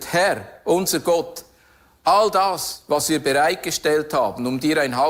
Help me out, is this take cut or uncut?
uncut